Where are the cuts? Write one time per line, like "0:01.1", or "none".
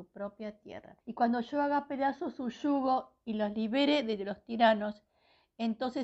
0:01.0